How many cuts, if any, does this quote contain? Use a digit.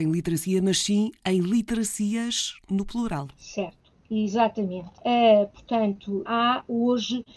2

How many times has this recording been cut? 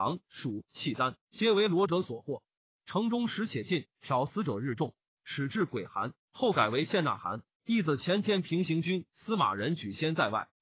2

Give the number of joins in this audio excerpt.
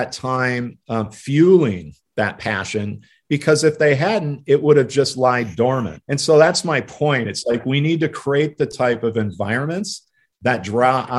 0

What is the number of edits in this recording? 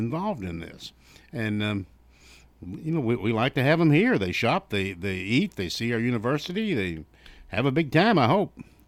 0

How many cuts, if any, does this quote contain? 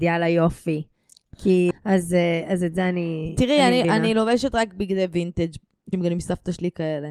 2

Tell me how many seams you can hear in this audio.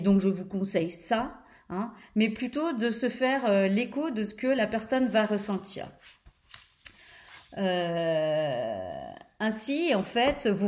0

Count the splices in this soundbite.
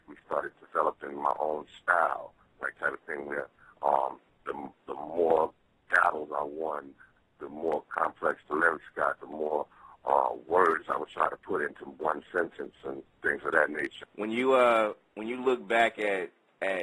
1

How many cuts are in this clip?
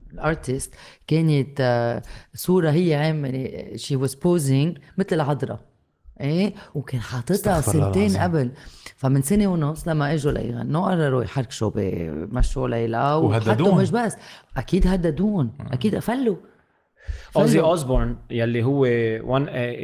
1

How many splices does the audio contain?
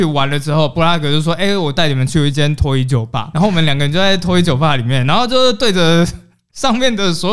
1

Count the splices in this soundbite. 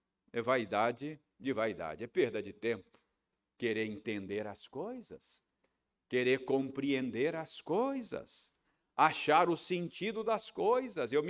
0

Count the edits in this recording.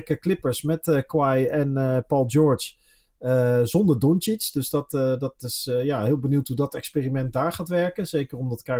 0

